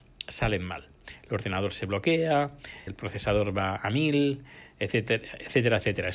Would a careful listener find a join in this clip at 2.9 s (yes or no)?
yes